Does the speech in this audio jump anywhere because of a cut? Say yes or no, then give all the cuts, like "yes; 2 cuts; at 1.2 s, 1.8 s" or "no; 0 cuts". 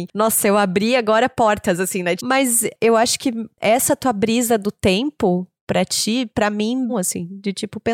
yes; 2 cuts; at 2.2 s, 6.9 s